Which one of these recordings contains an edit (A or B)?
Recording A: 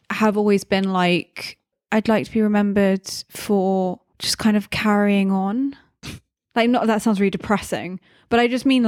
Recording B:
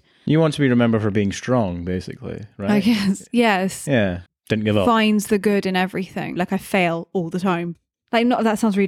B